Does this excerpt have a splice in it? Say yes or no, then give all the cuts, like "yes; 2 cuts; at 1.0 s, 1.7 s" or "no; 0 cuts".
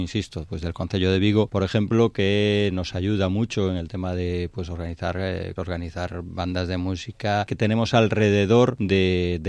yes; 2 cuts; at 5.6 s, 7.5 s